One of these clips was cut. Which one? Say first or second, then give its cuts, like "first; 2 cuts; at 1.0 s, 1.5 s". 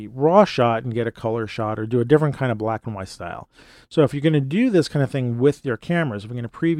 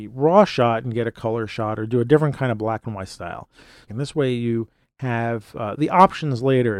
second; 1 cut; at 3.9 s